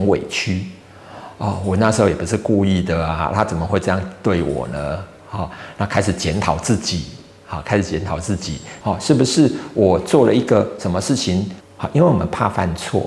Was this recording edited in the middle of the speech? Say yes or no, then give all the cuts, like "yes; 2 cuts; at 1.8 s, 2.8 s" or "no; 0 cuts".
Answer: yes; 2 cuts; at 8.8 s, 11.6 s